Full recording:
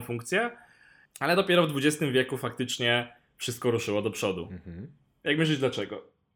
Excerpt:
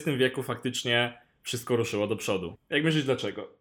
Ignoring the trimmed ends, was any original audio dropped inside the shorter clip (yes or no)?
yes